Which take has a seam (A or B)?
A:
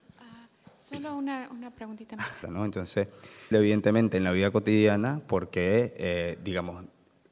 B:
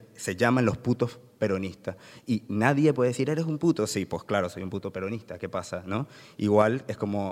A